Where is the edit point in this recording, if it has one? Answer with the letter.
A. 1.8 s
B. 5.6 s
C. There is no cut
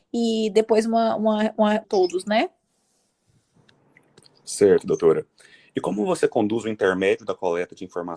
A